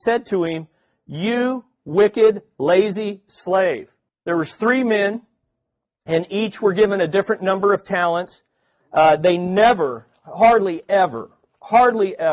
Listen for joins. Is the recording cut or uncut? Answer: cut